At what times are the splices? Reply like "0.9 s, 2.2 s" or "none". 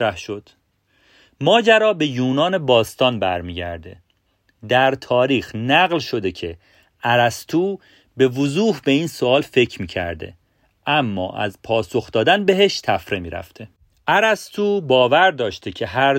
none

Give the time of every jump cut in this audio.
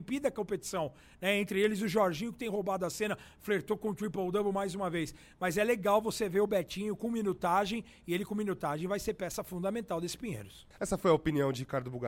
10.7 s

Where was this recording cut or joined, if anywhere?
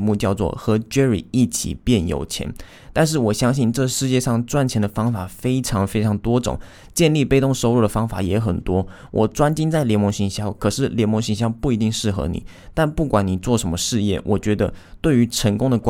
none

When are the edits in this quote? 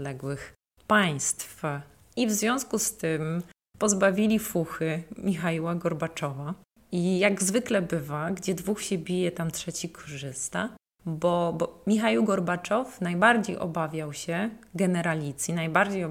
6.8 s

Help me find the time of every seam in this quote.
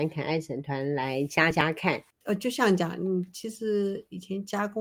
none

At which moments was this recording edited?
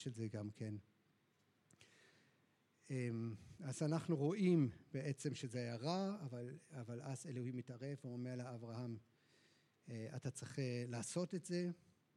none

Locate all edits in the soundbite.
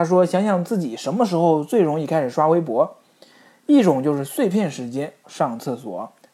5.2 s

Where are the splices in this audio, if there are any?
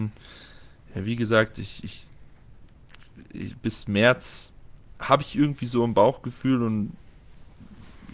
none

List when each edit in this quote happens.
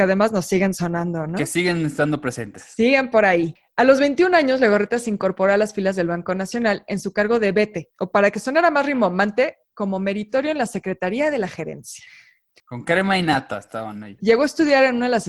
12.6 s, 14.2 s

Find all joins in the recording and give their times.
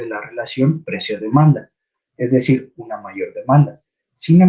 2.7 s

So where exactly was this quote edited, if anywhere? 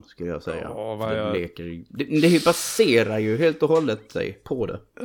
none

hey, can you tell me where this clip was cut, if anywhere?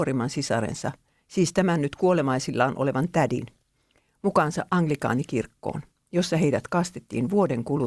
none

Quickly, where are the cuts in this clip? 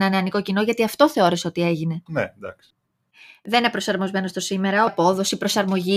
2.1 s, 4.9 s

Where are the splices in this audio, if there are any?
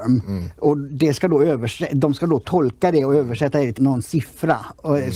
3.8 s

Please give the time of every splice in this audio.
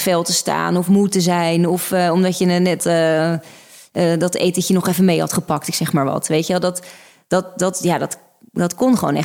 2.8 s

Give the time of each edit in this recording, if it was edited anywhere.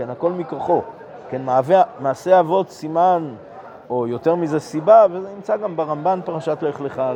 3.9 s, 5.1 s

